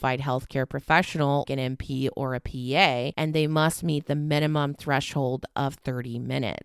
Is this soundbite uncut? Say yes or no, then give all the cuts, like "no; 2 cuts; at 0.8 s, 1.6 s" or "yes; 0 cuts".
no; 1 cut; at 1.4 s